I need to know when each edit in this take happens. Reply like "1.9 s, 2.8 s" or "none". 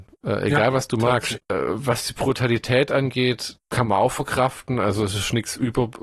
1.4 s